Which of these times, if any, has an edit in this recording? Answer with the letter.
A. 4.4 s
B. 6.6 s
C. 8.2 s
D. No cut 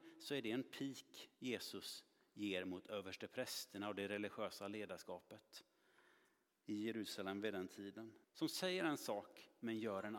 C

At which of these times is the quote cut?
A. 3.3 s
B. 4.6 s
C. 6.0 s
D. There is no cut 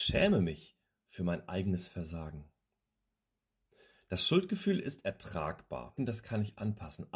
C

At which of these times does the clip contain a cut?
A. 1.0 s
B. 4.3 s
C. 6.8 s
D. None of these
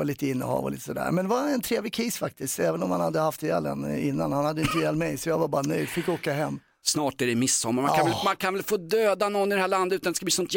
D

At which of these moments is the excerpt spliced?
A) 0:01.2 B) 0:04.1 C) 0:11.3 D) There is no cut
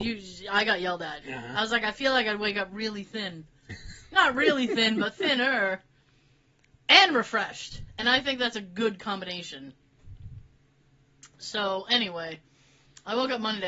A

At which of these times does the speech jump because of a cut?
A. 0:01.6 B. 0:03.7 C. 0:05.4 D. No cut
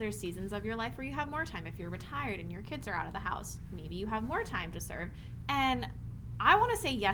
C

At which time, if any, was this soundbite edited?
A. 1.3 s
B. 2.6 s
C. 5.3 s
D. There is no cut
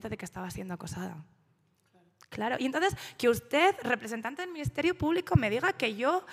D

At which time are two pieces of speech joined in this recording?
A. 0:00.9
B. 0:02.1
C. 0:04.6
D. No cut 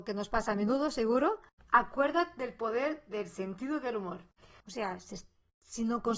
C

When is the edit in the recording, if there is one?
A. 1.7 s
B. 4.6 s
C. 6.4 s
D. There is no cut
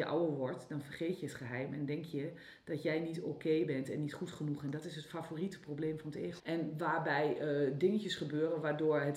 C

